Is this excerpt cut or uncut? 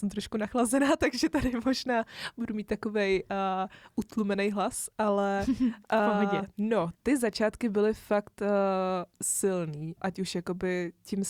cut